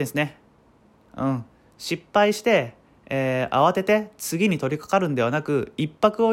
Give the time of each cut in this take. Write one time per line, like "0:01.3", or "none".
none

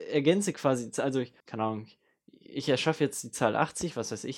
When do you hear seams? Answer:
0:01.4

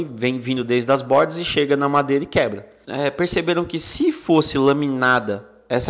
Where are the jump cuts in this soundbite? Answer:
0:02.8

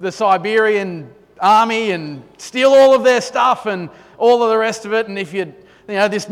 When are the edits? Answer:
none

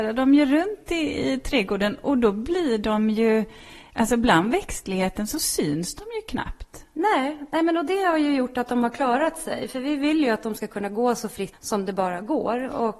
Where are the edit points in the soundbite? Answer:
0:11.5

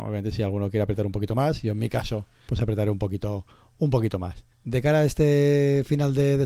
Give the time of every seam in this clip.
0:02.5
0:04.5

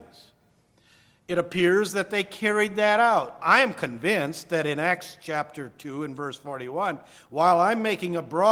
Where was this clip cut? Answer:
0:03.4
0:07.2

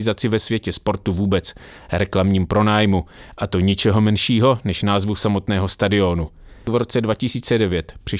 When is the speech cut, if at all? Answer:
none

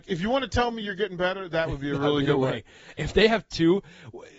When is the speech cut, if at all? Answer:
none

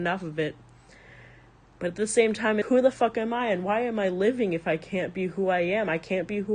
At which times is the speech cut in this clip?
0:02.6

